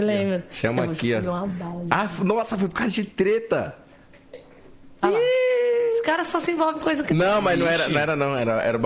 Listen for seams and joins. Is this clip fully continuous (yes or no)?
yes